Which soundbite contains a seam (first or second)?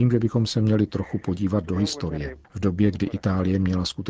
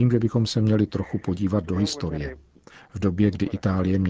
first